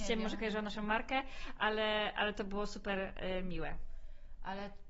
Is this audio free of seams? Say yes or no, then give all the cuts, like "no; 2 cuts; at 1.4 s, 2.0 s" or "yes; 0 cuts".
yes; 0 cuts